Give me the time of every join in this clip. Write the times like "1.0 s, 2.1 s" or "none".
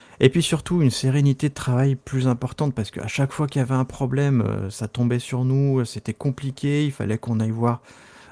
none